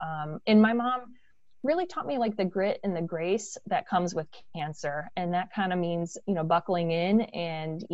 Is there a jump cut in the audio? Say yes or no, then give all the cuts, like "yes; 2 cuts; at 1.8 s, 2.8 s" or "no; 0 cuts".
no; 0 cuts